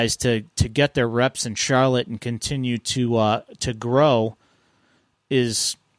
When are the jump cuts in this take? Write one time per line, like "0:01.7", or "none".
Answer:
none